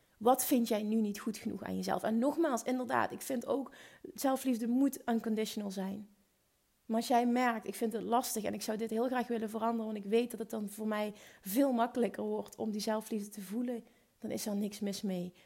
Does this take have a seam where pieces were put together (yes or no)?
no